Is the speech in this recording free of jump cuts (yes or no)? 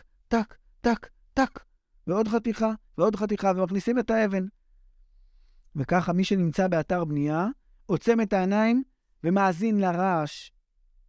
yes